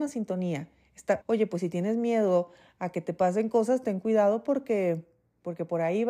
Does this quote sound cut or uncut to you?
cut